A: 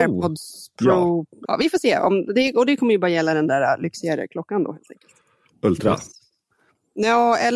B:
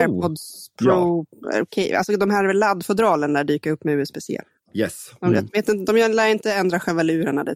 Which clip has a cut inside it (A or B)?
A